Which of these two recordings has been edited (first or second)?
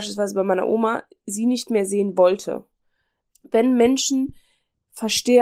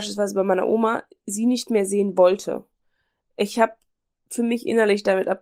first